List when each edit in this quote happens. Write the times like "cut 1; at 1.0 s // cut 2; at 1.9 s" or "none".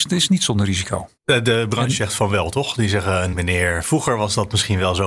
cut 1; at 1.2 s // cut 2; at 3.3 s

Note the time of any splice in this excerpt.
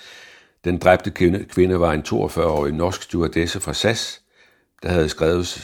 none

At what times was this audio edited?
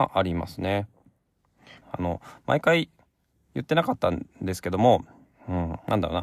cut 1; at 1.8 s

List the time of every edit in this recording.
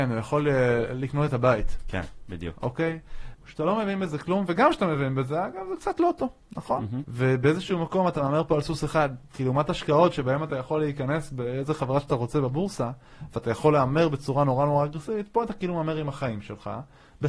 cut 1; at 3.3 s // cut 2; at 7.0 s

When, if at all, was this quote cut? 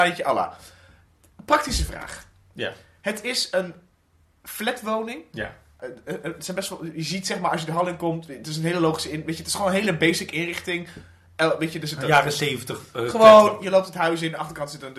none

